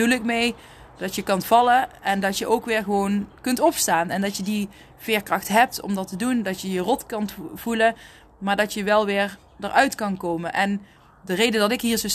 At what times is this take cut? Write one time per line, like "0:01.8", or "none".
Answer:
none